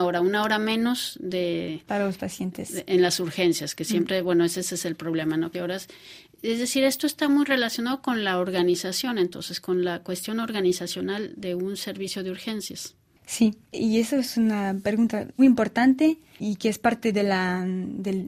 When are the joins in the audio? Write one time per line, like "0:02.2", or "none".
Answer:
0:05.5
0:15.4